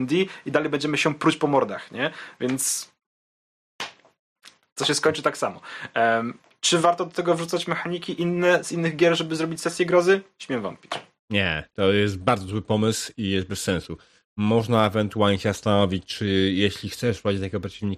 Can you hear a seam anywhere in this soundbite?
no; 0 cuts

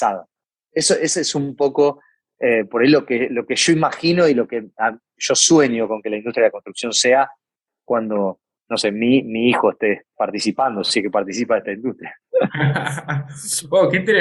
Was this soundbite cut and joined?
no; 0 cuts

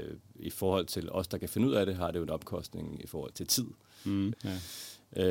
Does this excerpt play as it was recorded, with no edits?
no; 2 cuts; at 3.3 s, 4.3 s

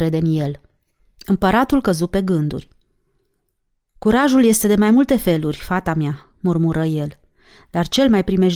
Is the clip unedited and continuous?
yes; 0 cuts

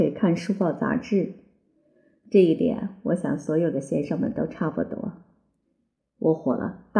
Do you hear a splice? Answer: yes; 1 cut; at 6.0 s

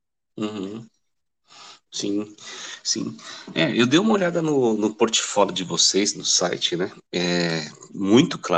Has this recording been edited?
no; 0 cuts

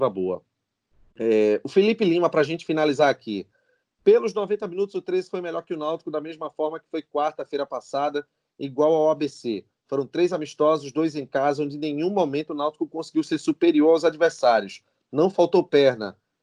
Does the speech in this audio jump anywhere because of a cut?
no; 0 cuts

